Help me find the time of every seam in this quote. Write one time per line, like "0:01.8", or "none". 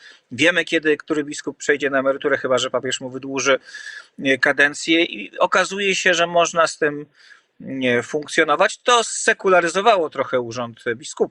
none